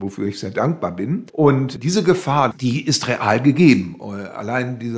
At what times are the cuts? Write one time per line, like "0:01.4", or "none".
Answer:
0:01.3
0:02.5